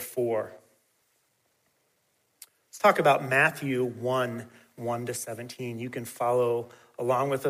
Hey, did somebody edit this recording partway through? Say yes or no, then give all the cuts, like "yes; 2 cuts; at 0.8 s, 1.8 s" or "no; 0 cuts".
no; 0 cuts